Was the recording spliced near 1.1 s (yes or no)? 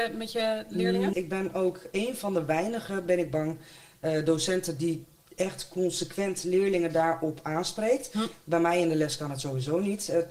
yes